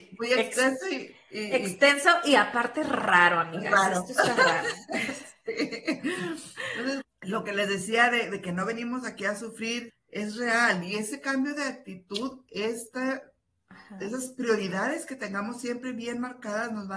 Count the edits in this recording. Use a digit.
2